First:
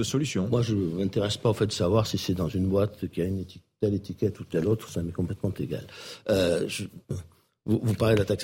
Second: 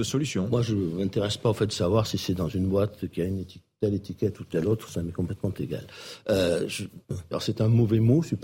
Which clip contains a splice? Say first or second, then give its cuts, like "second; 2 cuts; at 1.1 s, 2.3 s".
second; 1 cut; at 7.3 s